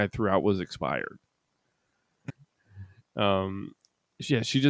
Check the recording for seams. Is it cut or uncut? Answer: cut